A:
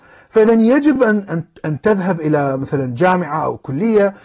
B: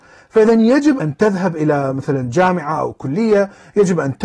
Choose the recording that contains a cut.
B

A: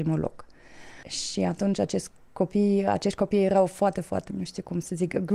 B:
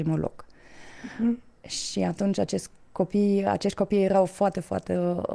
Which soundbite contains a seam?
A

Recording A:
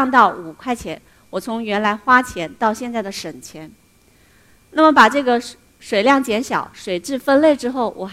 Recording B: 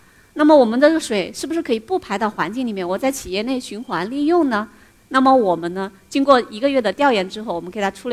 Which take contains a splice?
B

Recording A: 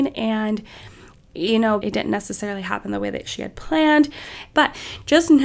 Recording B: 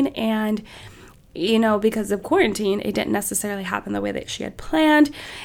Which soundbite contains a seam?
A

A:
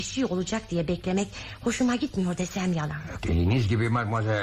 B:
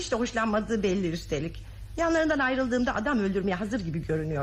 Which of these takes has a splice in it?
A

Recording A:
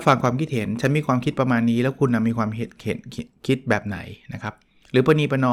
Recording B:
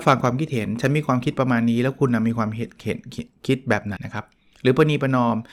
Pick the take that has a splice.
B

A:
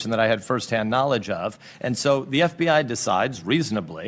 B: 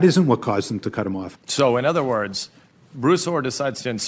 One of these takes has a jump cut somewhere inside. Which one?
B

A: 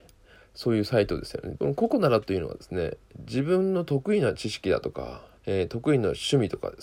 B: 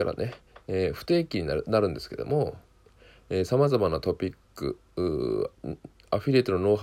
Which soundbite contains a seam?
A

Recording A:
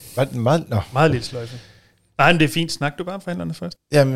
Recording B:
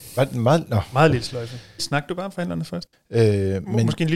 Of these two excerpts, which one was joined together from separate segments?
B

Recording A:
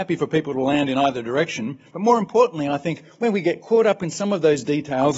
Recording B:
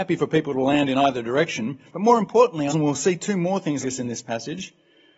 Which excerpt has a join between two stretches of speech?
B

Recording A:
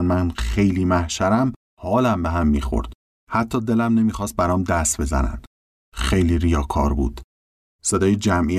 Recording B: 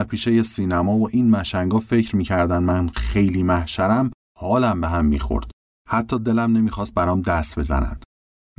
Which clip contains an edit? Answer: A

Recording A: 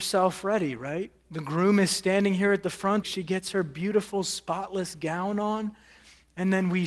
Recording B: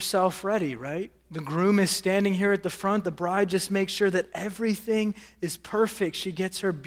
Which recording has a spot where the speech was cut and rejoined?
A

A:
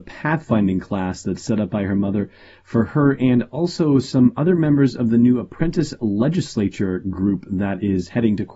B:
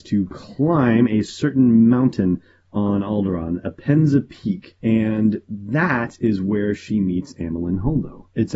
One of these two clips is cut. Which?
B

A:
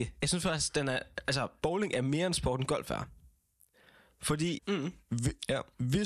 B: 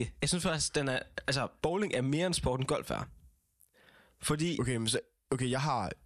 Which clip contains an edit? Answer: A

